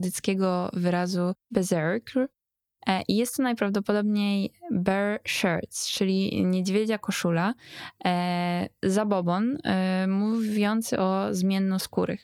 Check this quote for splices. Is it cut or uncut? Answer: uncut